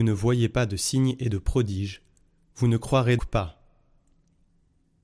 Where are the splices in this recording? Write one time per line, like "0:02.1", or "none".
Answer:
0:03.2